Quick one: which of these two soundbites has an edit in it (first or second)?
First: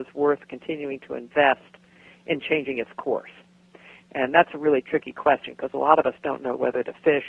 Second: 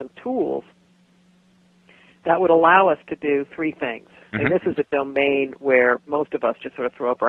second